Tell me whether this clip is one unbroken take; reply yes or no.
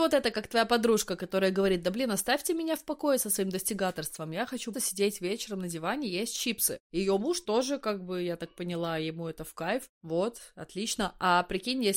no